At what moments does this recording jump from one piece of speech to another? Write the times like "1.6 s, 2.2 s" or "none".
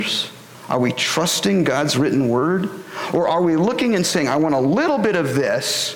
none